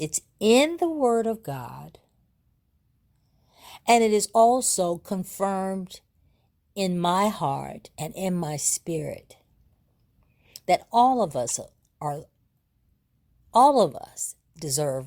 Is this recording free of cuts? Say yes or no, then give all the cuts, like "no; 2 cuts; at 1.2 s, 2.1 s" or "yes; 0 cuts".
yes; 0 cuts